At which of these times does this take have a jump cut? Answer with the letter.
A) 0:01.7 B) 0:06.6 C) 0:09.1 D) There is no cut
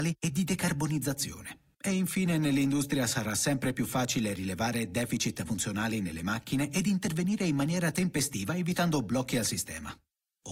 A